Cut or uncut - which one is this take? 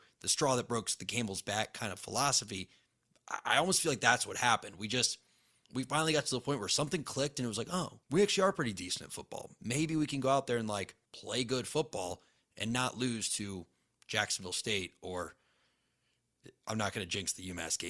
cut